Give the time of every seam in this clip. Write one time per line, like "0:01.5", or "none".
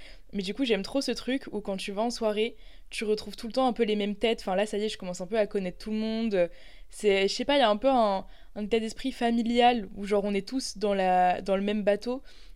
none